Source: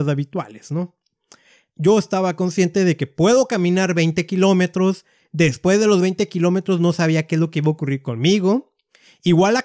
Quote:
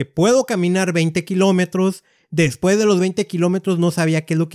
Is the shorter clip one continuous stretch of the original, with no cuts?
yes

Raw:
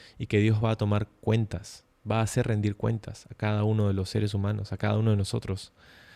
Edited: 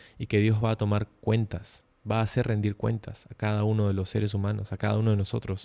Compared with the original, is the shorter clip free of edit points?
yes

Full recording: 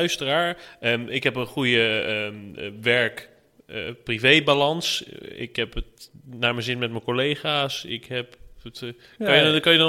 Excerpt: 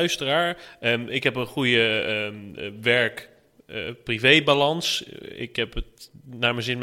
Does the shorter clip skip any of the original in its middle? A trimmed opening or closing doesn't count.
no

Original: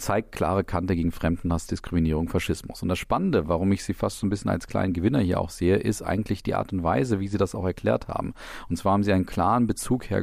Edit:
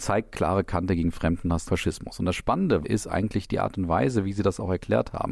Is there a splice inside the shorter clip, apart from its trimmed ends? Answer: yes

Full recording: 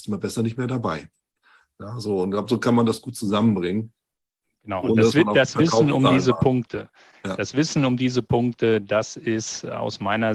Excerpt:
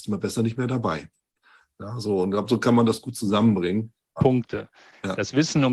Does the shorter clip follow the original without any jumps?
no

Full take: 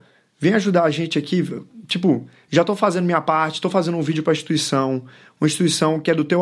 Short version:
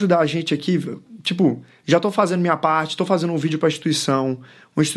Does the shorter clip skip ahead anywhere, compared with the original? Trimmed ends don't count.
no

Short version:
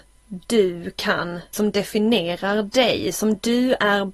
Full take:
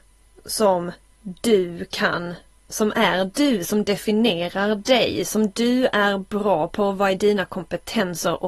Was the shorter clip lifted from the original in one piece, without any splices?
no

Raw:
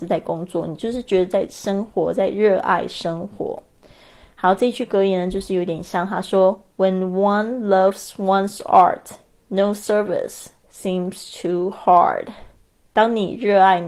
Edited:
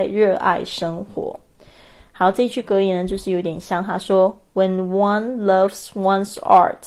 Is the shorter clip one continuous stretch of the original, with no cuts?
yes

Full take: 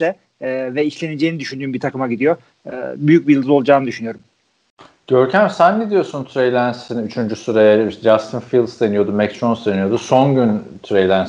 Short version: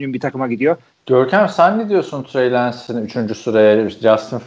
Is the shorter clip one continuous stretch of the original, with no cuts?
no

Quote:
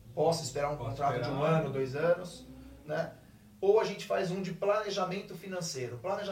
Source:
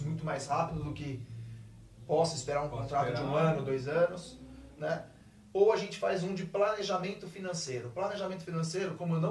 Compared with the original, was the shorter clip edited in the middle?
no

